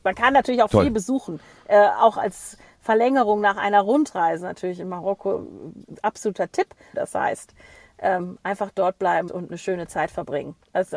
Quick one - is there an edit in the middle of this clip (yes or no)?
yes